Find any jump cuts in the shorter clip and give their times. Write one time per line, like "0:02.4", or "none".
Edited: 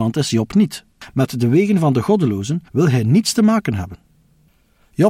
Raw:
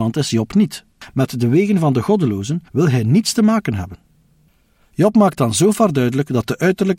none